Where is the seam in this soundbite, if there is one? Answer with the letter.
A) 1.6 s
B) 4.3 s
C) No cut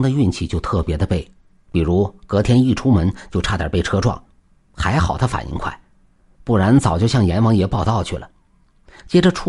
C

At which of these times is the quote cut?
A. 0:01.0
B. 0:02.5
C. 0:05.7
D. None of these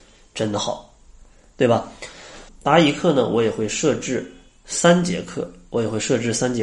B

